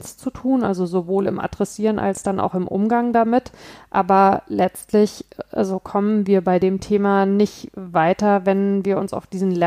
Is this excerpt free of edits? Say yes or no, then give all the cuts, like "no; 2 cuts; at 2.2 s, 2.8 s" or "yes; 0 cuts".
yes; 0 cuts